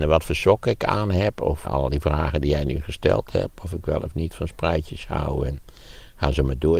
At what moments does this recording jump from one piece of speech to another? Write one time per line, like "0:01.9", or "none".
0:01.6